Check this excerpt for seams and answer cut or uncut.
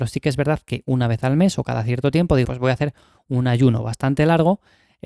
cut